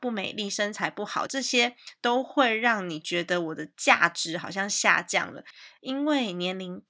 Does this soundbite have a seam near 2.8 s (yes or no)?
no